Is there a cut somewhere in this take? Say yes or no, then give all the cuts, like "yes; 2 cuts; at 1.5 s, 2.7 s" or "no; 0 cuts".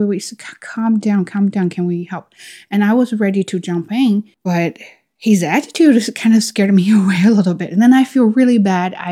no; 0 cuts